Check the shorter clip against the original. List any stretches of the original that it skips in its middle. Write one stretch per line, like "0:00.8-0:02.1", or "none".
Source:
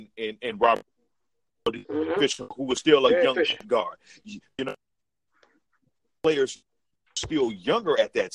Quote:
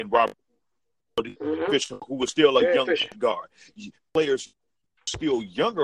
0:04.4-0:06.1